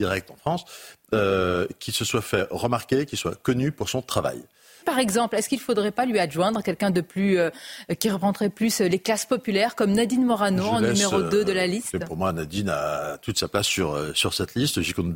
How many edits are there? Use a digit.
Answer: 1